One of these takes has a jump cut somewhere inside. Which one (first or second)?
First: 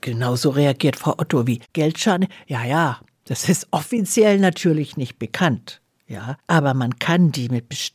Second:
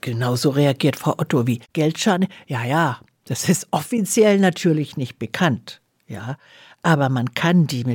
first